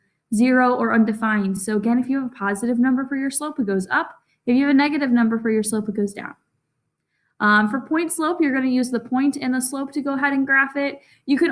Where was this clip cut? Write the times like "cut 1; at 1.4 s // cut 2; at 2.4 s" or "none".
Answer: none